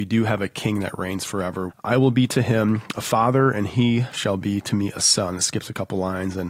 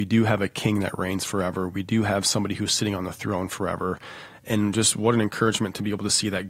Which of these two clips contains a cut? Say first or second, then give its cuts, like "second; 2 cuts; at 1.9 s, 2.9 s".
first; 1 cut; at 1.7 s